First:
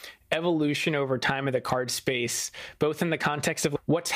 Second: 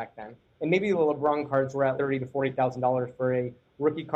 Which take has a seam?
second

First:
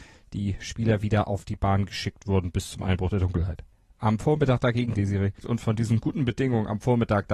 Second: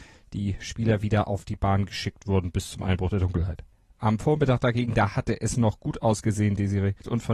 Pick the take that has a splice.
first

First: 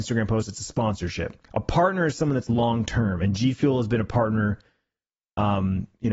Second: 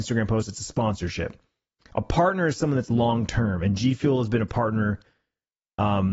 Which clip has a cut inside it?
first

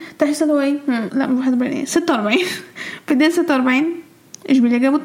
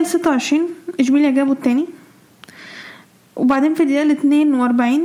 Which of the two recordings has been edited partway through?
first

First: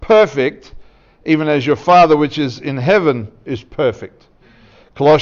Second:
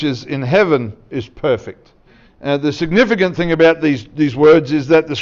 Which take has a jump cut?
second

